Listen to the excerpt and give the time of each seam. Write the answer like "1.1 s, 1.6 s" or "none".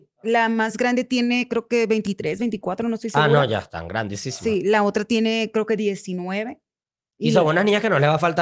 none